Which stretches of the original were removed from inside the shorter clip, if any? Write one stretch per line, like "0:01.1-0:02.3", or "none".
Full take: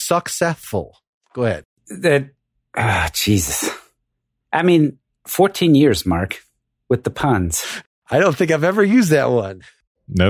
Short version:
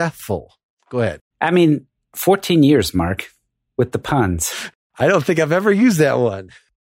0:01.7-0:04.4